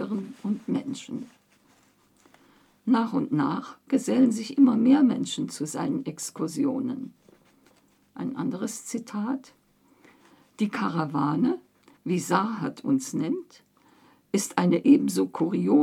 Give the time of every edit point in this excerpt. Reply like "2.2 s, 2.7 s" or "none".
none